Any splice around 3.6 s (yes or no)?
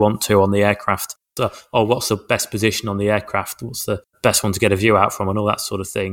no